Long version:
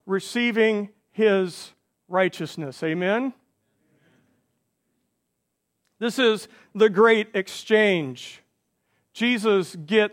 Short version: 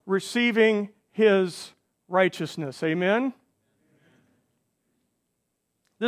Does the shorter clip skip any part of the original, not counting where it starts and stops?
no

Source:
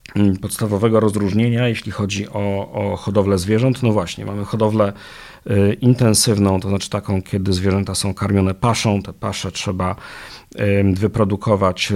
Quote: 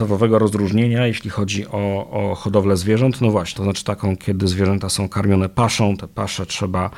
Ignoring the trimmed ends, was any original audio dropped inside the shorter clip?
yes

